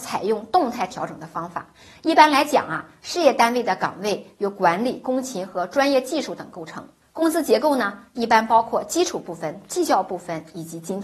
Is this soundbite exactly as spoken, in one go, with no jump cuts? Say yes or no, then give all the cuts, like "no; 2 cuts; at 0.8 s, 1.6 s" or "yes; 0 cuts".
yes; 0 cuts